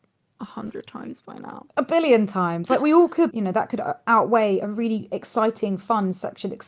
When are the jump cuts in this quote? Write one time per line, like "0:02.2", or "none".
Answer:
0:03.3